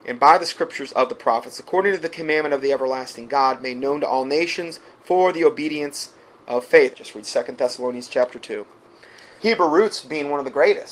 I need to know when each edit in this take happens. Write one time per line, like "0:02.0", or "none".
0:06.9
0:09.4